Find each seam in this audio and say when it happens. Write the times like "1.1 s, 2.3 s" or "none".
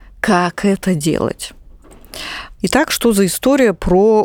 2.6 s

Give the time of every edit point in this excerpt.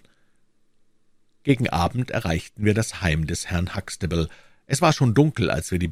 none

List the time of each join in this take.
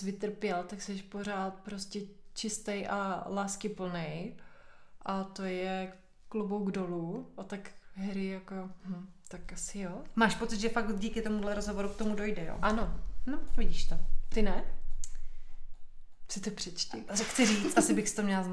none

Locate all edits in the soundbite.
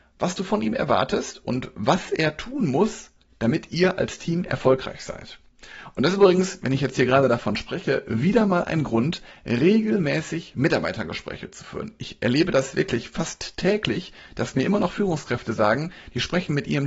none

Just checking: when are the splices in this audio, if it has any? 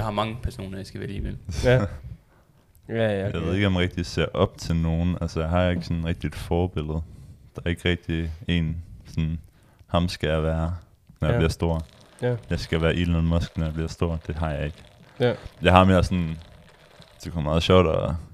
none

